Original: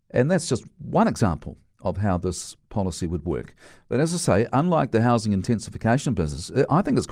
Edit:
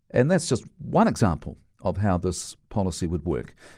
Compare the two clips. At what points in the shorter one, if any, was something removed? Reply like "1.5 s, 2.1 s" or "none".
none